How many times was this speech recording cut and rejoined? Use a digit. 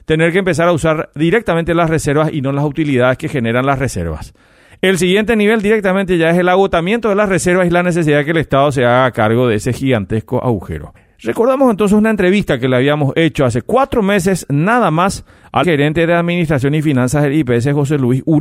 1